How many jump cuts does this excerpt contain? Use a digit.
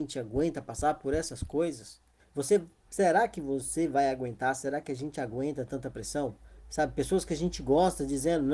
1